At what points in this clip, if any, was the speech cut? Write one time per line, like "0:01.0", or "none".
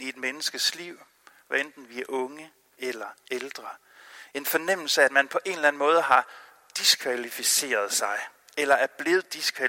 none